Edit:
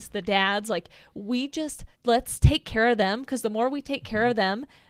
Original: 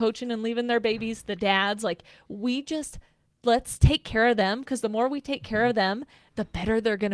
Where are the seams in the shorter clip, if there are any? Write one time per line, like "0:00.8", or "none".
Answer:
0:01.9